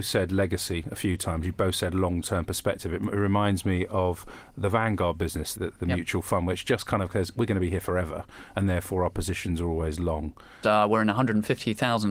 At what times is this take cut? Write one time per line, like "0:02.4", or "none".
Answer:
0:05.6
0:10.6